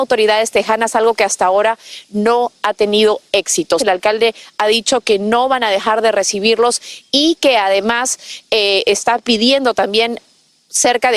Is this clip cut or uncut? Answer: cut